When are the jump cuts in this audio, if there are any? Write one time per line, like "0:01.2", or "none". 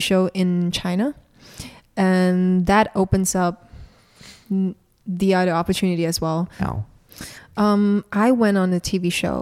0:06.6